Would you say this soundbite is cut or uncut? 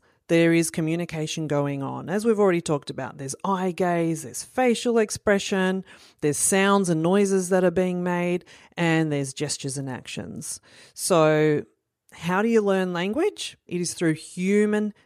cut